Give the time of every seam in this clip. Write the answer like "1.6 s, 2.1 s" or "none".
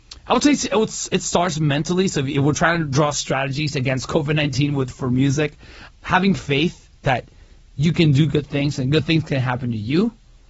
5.9 s, 7.0 s